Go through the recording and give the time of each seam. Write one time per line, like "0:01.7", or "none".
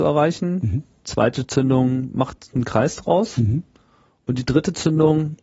none